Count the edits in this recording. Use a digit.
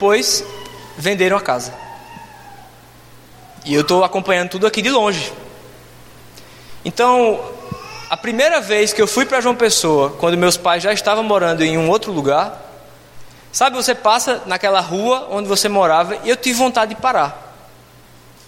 0